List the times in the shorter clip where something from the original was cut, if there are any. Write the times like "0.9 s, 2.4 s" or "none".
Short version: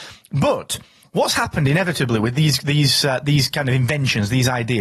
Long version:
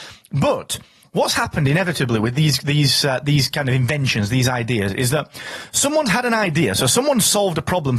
none